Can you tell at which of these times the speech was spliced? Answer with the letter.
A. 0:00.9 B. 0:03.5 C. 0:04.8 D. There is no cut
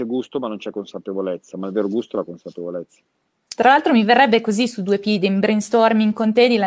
B